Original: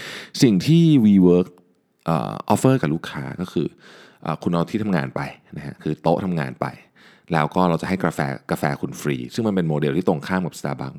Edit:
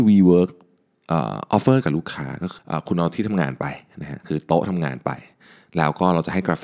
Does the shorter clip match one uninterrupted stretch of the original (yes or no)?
no